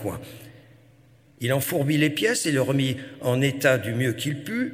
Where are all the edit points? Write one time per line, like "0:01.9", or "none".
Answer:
none